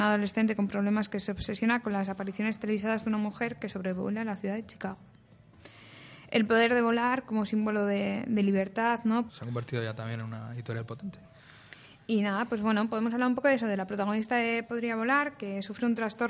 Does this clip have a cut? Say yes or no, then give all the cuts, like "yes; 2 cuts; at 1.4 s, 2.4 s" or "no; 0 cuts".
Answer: yes; 1 cut; at 9.3 s